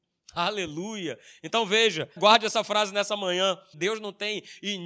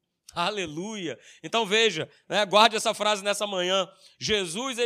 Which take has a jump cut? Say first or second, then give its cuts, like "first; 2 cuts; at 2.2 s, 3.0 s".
first; 2 cuts; at 2.2 s, 3.7 s